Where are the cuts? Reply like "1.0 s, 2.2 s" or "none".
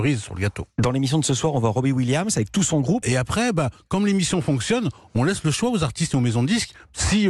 3.0 s